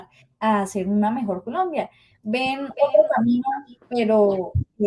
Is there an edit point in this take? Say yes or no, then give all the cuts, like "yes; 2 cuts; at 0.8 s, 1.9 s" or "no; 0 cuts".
yes; 2 cuts; at 2.1 s, 3.7 s